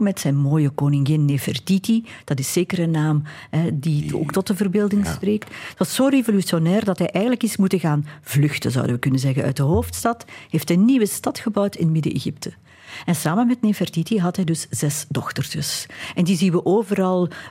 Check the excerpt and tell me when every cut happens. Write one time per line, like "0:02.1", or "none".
none